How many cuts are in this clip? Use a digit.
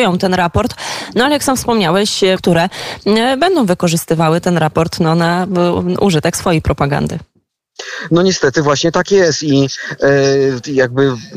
1